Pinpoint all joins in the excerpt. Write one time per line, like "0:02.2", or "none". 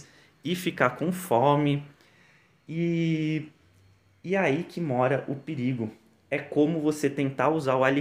none